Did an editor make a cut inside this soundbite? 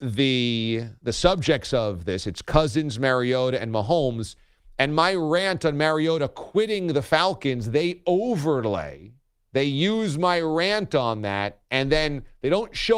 no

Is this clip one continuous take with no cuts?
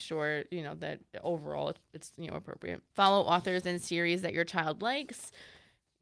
no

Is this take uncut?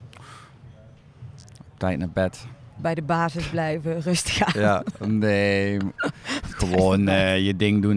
yes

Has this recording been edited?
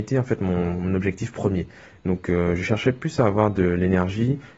no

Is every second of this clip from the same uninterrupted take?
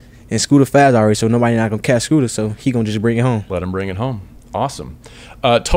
yes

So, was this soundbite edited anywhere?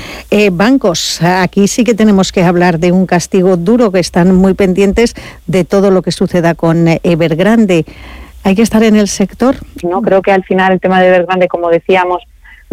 yes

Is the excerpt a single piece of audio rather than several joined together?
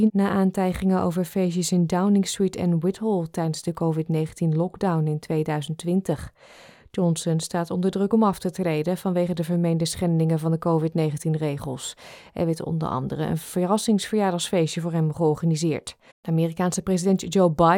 no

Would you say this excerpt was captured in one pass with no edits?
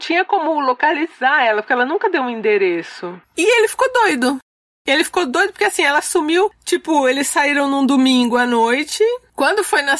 no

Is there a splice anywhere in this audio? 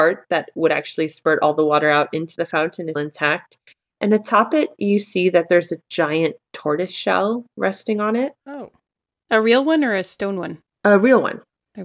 yes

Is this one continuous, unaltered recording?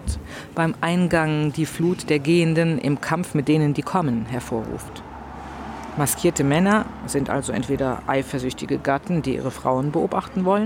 yes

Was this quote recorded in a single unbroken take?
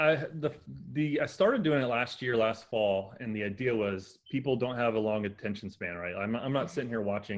yes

